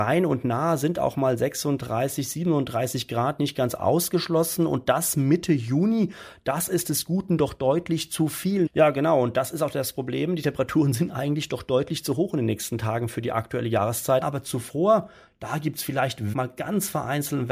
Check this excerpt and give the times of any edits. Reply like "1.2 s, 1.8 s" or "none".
8.7 s, 14.2 s, 16.3 s